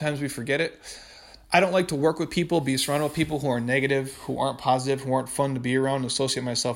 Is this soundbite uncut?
yes; 0 cuts

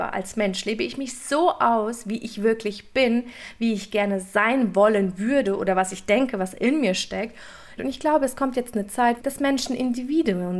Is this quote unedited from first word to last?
no; 2 cuts; at 7.8 s, 9.2 s

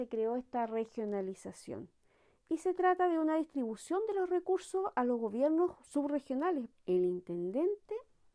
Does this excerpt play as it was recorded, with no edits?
no; 1 cut; at 6.7 s

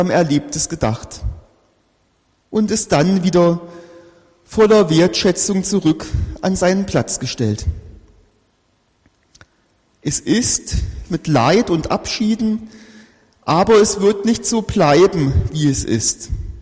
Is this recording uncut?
no; 2 cuts; at 9.9 s, 11.1 s

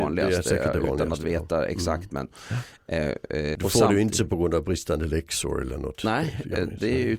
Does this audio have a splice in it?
yes; 1 cut; at 3.5 s

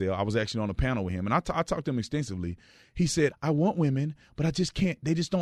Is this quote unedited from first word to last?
no; 1 cut; at 3.3 s

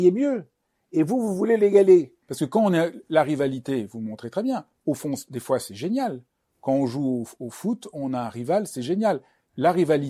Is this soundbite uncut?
no; 1 cut; at 2.2 s

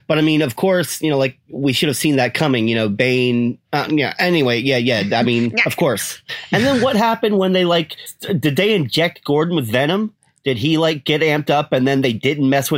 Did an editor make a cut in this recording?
no; 0 cuts

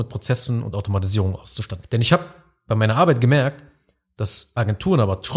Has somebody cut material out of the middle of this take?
yes; 1 cut; at 1.8 s

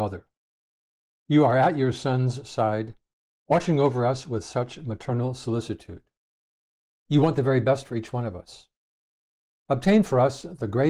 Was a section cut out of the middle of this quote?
no; 0 cuts

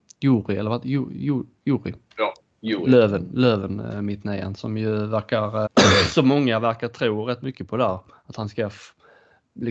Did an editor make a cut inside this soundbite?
yes; 1 cut; at 5.7 s

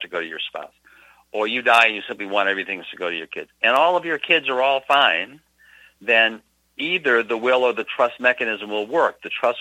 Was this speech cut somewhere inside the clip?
no; 0 cuts

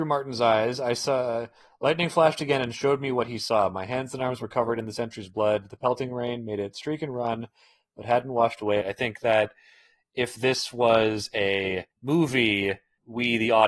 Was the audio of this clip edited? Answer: yes; 2 cuts; at 8.8 s, 11.9 s

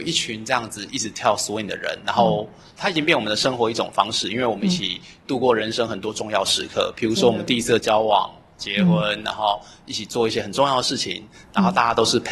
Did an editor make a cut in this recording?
no; 0 cuts

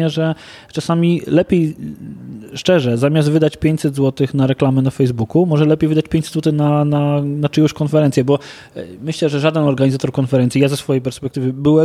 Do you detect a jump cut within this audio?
no; 0 cuts

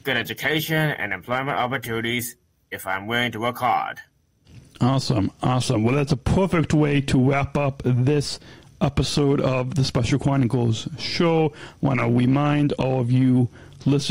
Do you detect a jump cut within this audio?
no; 0 cuts

